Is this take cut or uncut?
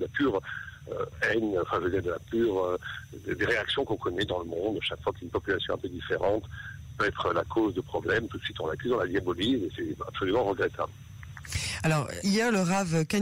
cut